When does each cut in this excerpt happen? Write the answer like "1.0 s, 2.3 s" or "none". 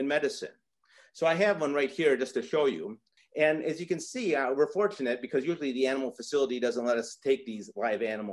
3.2 s